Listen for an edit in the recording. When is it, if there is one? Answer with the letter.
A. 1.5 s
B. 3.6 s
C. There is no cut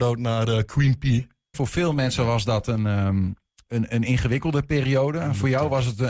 A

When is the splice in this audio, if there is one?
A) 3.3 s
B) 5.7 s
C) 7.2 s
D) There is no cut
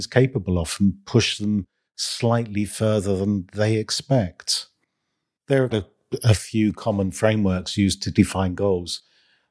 B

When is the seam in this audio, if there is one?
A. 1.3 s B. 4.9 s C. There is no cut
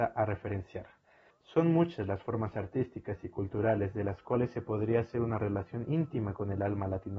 A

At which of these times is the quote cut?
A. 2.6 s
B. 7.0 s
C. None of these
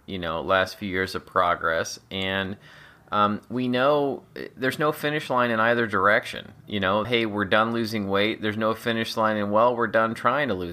B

